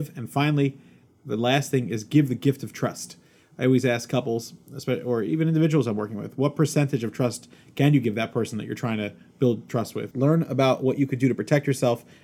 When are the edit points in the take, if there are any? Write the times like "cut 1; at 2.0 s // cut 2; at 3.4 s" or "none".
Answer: cut 1; at 10.1 s